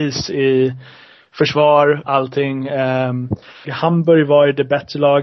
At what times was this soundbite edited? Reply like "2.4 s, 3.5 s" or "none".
2.0 s, 3.6 s